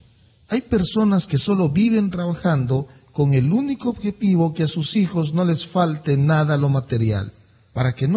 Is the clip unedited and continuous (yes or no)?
yes